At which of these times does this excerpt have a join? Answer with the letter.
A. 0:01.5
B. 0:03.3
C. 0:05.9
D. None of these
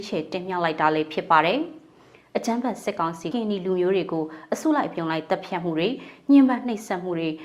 B